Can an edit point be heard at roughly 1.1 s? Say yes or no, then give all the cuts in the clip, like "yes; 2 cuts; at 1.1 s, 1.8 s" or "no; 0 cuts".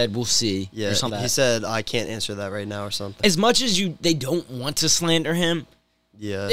yes; 2 cuts; at 1.1 s, 3.2 s